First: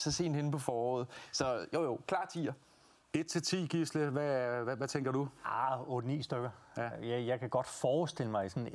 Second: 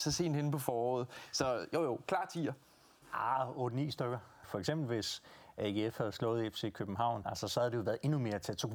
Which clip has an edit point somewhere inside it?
second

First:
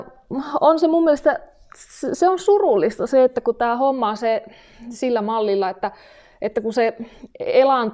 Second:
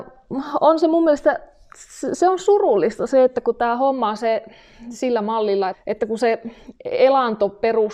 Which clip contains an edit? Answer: second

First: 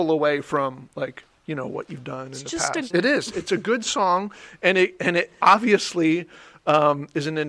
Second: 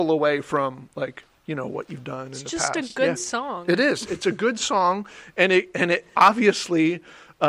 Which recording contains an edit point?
first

